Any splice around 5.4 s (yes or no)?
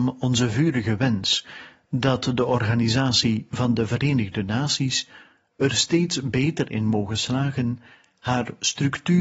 no